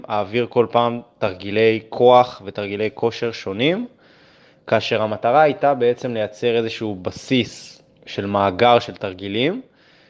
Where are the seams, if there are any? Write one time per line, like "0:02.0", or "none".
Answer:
0:07.9